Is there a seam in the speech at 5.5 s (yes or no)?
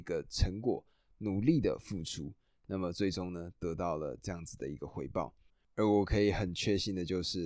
yes